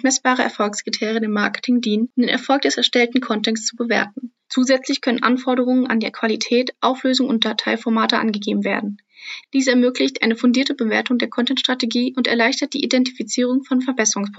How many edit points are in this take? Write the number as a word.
two